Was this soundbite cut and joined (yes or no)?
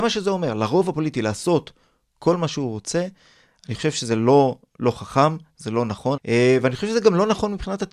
yes